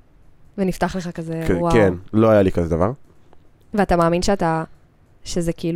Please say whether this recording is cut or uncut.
uncut